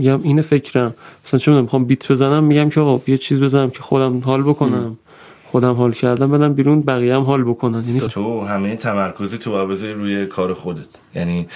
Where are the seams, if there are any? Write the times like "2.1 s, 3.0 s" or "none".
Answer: 8.1 s